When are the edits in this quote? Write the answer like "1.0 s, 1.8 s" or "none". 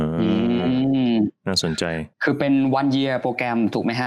2.1 s